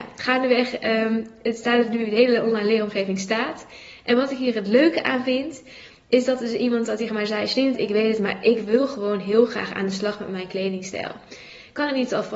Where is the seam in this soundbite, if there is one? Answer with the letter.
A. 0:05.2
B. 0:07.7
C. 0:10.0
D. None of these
B